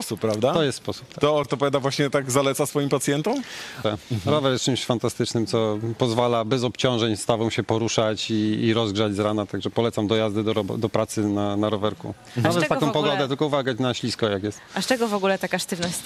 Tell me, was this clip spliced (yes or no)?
yes